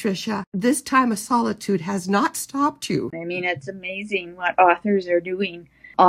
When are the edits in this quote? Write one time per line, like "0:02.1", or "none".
0:03.1